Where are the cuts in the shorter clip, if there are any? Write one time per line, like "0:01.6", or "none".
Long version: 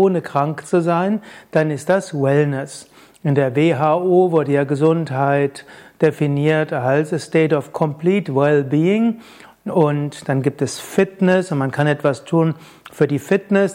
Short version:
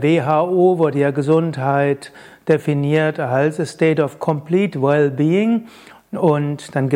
none